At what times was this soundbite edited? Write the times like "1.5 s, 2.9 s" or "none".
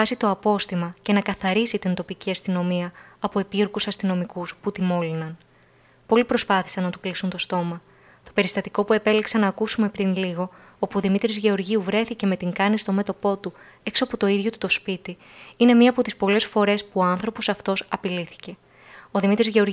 none